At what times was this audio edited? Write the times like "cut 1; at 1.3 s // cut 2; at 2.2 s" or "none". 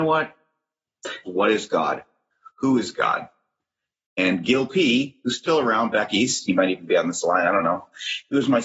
cut 1; at 1.2 s